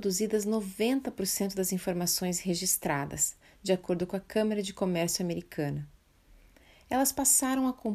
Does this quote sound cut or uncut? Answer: uncut